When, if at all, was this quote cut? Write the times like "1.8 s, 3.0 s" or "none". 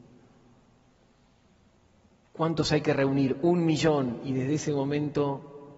none